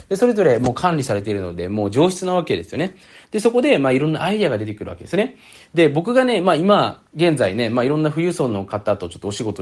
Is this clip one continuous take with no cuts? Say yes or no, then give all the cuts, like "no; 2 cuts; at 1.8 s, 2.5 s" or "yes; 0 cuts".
yes; 0 cuts